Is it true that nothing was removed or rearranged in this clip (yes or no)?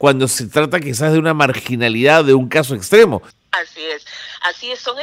no